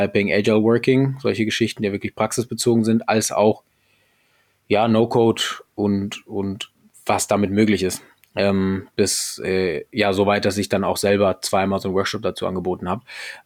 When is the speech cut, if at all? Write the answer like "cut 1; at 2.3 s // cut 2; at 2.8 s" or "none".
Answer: none